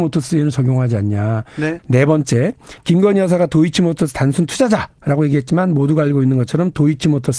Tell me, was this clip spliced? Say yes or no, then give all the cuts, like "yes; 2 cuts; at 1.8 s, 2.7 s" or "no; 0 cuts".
yes; 1 cut; at 1.8 s